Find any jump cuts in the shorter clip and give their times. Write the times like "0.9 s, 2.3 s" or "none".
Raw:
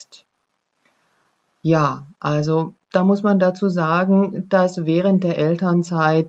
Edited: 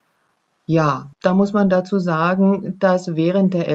1.1 s